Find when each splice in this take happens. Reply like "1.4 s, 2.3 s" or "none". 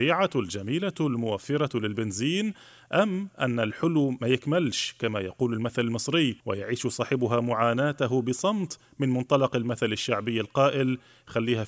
6.4 s